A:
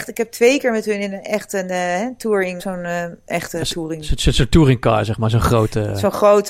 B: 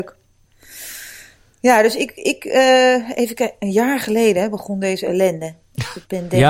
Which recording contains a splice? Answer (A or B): A